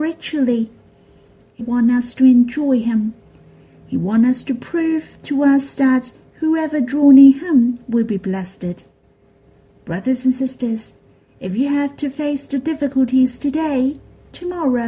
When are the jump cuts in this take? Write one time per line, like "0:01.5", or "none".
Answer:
0:01.6